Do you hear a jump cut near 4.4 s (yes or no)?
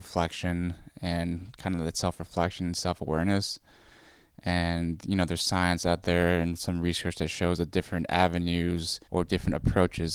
no